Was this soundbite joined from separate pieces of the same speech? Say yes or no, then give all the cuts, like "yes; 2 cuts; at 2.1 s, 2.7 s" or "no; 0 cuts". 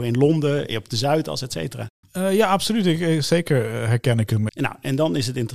yes; 2 cuts; at 2.0 s, 4.5 s